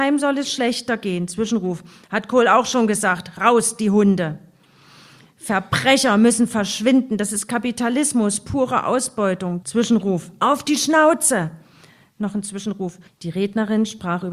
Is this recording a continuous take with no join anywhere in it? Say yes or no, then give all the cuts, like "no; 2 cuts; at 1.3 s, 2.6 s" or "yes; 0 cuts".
no; 2 cuts; at 9.6 s, 13.1 s